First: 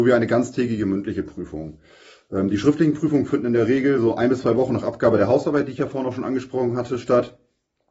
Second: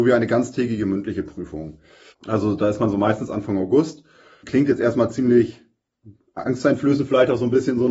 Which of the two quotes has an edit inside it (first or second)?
second